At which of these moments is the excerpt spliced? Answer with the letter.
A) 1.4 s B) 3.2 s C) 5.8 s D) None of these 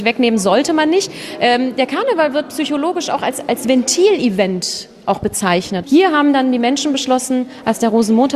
C